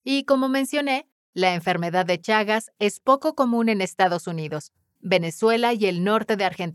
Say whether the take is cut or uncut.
cut